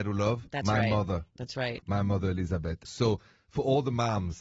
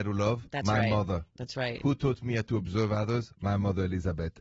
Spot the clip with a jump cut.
first; 2 cuts; at 1.8 s, 2.9 s

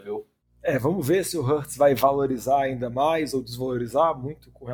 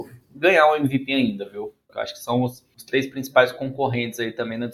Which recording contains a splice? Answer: second; 1 cut; at 1.9 s

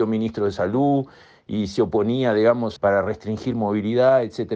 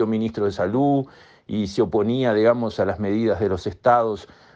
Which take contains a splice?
first; 1 cut; at 2.8 s

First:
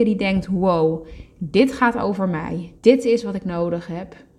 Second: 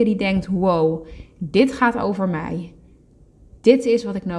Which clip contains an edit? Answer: first; 1 cut; at 2.8 s

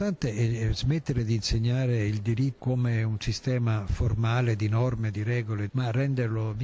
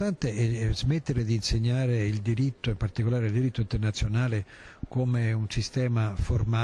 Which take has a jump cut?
first; 2 cuts; at 2.6 s, 5.7 s

